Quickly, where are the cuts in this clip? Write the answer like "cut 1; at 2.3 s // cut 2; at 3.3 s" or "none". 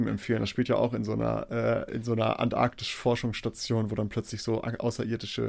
none